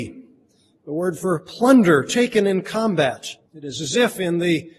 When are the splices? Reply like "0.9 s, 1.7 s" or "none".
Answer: 3.5 s